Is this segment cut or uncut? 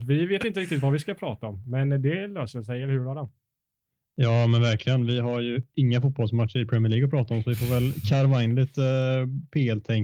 uncut